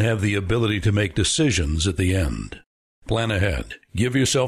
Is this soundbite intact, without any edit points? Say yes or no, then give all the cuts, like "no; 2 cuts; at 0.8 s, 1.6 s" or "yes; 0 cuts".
yes; 0 cuts